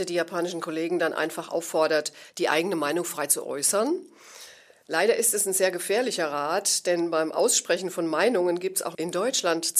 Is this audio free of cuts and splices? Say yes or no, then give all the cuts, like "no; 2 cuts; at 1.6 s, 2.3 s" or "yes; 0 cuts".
yes; 0 cuts